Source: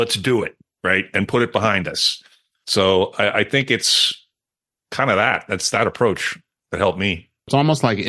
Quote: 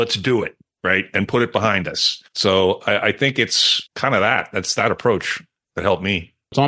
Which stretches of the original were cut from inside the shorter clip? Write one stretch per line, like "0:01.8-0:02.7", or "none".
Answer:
0:02.3-0:02.6
0:04.2-0:04.8

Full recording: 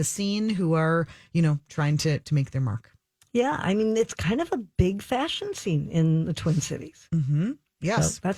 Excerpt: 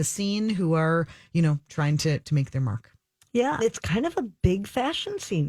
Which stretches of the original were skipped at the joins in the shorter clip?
0:03.6-0:03.9

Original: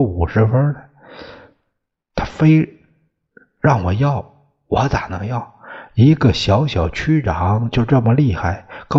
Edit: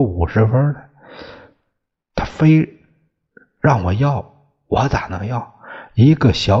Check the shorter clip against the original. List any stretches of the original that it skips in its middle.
none

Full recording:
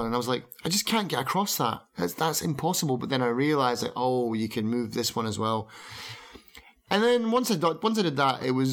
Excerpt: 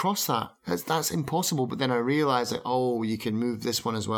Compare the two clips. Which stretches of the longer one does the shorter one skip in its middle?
none

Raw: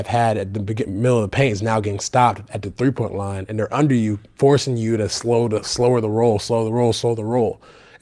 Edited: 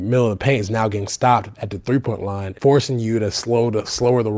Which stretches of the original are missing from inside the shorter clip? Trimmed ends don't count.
0:03.5-0:04.3

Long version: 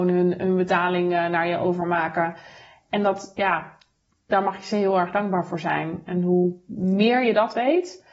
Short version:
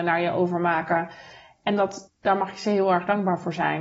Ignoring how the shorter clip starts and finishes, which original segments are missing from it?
0:03.3-0:04.1

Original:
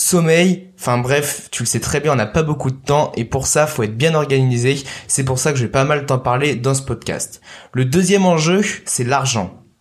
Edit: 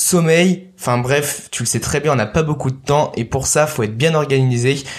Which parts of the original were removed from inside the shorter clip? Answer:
none

